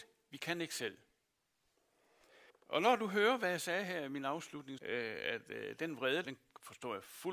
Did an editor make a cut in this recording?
yes; 3 cuts; at 2.5 s, 4.8 s, 6.2 s

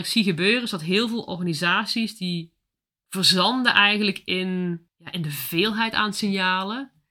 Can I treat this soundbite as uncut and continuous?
no; 1 cut; at 4.9 s

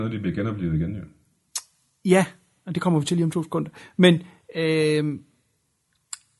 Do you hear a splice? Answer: no; 0 cuts

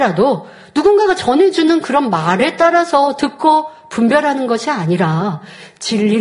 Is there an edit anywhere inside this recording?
no; 0 cuts

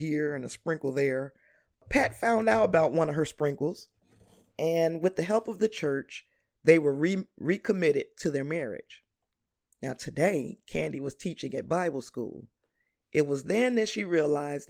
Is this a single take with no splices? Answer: yes; 0 cuts

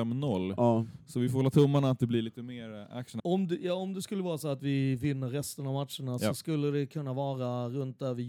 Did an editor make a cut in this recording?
yes; 1 cut; at 3.2 s

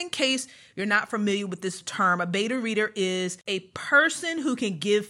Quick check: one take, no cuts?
yes; 0 cuts

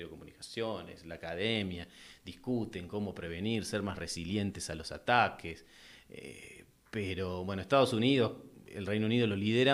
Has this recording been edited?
no; 0 cuts

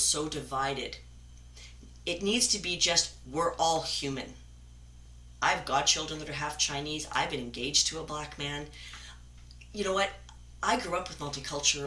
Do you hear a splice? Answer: no; 0 cuts

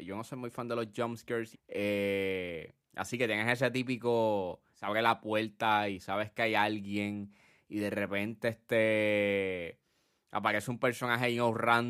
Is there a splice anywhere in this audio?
yes; 1 cut; at 1.5 s

